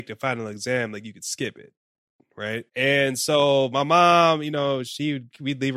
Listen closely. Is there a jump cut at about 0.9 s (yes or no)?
no